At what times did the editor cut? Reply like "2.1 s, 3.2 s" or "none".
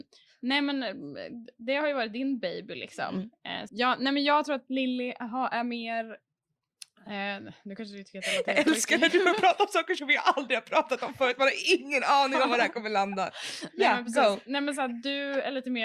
3.7 s